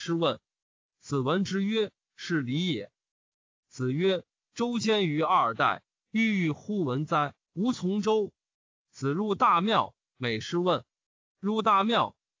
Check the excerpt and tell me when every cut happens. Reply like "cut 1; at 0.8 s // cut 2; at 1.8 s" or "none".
cut 1; at 3.3 s // cut 2; at 7.5 s // cut 3; at 11.3 s